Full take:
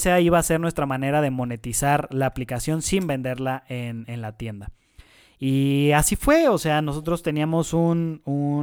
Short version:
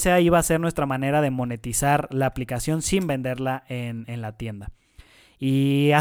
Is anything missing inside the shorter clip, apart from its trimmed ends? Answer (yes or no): no